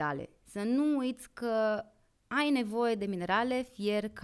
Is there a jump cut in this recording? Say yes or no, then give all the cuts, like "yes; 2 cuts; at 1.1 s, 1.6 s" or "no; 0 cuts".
no; 0 cuts